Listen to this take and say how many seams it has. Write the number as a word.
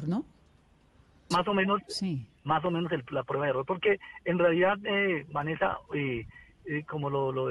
one